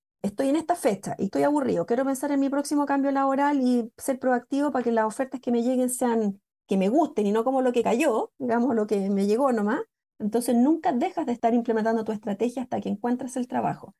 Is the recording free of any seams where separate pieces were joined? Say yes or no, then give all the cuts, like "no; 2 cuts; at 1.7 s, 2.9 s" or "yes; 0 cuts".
no; 1 cut; at 10.1 s